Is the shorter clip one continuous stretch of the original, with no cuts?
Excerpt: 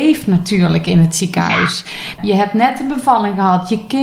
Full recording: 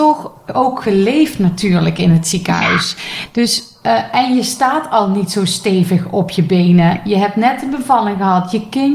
no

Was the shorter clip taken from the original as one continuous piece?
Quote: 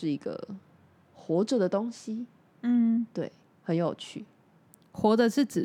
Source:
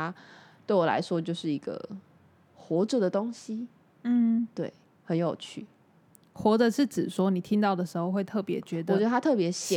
yes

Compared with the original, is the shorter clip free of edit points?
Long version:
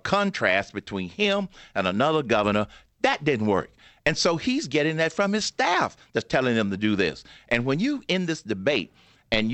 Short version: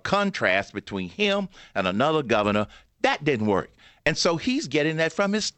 yes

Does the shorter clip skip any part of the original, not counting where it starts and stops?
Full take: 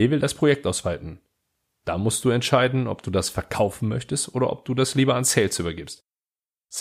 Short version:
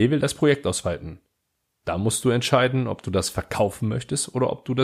no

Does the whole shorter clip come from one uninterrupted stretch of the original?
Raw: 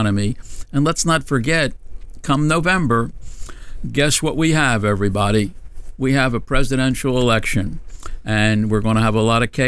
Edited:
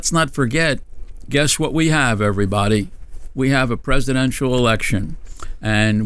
no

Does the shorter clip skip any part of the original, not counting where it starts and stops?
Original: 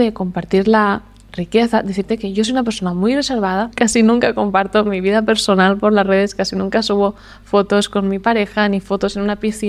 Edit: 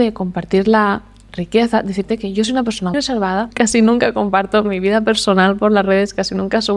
yes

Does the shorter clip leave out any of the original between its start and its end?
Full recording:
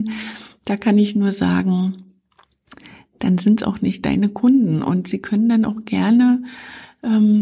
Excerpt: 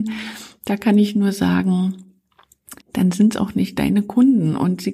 yes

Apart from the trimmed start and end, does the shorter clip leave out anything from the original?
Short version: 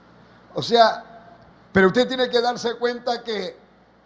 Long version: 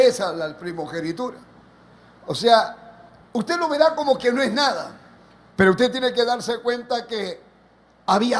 yes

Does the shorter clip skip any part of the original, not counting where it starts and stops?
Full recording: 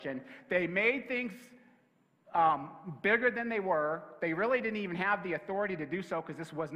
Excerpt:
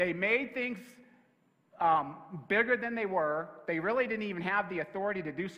no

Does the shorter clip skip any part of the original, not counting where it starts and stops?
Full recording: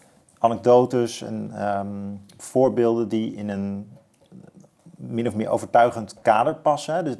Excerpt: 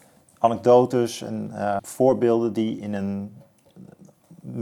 yes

